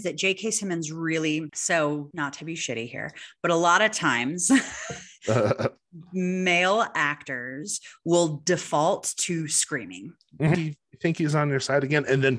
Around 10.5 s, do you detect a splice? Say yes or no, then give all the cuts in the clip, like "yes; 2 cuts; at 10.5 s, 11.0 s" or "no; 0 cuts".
yes; 1 cut; at 10.5 s